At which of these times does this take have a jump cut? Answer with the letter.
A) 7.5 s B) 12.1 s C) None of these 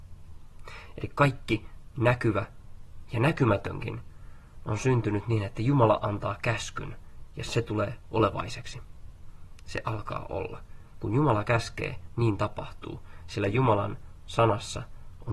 A